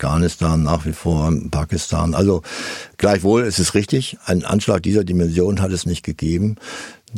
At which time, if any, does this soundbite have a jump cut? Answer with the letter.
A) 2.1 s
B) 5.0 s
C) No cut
C